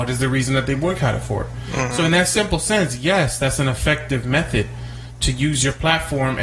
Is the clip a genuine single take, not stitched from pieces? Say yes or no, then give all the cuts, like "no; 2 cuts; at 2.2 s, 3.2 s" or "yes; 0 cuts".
yes; 0 cuts